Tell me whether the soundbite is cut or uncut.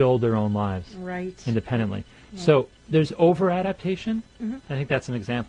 uncut